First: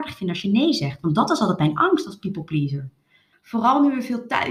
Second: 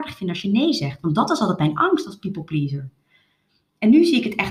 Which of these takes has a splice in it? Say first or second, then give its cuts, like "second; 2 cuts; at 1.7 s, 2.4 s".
first; 1 cut; at 3.3 s